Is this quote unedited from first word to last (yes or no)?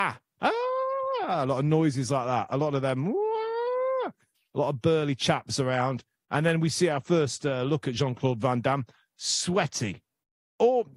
yes